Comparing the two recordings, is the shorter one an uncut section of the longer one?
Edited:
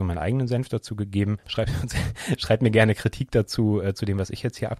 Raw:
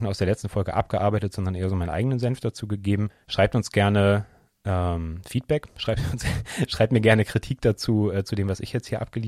no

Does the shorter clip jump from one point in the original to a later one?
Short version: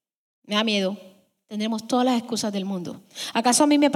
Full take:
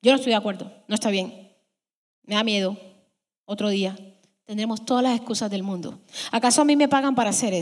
yes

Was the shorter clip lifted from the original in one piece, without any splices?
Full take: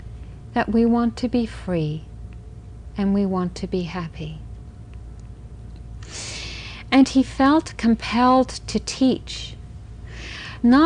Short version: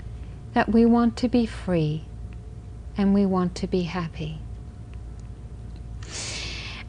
yes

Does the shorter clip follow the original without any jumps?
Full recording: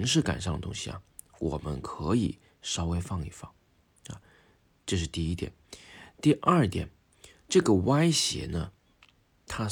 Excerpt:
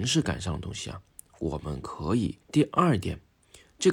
no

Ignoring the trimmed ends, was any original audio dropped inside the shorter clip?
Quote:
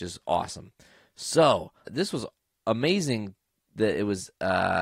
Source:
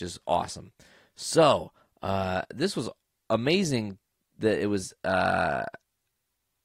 yes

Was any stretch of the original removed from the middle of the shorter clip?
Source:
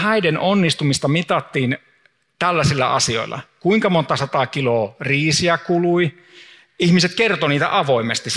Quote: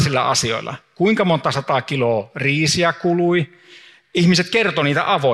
no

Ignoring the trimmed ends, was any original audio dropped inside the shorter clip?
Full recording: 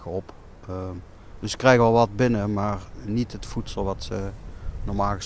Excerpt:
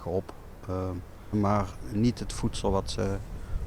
yes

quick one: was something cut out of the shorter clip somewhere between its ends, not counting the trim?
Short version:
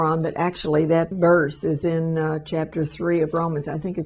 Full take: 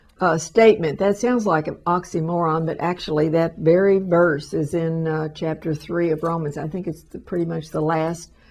yes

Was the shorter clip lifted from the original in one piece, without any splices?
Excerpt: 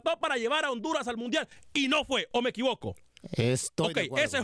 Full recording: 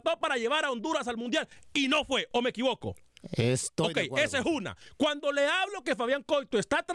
yes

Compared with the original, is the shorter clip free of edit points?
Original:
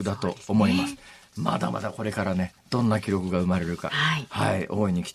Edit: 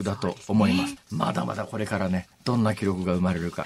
no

